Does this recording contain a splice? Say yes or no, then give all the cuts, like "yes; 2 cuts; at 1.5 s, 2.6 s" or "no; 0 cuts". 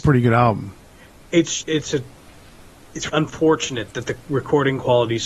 yes; 2 cuts; at 1.6 s, 3.1 s